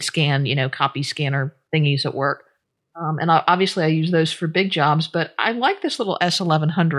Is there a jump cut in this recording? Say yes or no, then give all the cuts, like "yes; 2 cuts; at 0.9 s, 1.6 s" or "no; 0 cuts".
no; 0 cuts